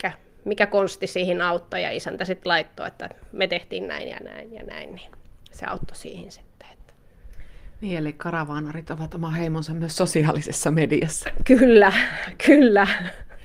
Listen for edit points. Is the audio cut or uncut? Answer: uncut